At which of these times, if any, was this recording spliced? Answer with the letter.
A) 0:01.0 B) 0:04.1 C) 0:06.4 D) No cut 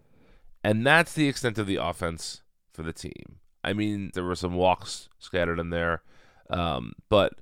B